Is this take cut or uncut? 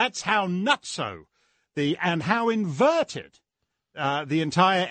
uncut